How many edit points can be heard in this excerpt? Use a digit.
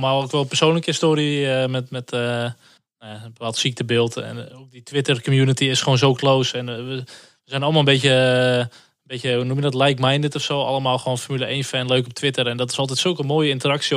0